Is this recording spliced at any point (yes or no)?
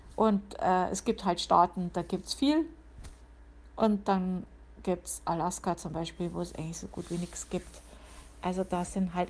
no